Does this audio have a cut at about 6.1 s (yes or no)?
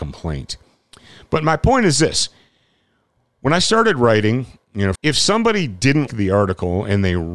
yes